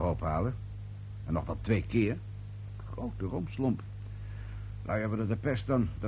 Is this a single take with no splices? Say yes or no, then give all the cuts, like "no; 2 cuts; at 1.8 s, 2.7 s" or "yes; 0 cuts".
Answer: yes; 0 cuts